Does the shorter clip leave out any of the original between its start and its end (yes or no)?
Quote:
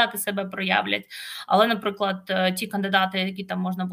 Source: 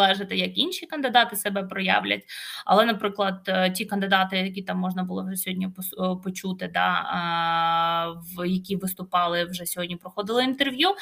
no